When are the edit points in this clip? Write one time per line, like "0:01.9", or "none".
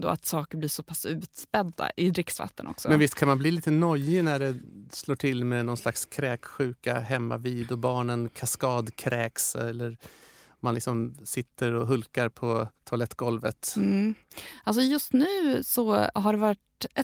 0:12.8